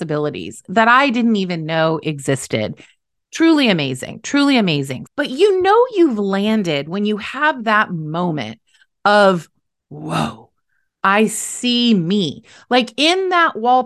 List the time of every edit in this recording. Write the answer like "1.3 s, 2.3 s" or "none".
5.1 s